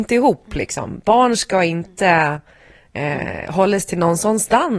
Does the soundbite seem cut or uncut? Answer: uncut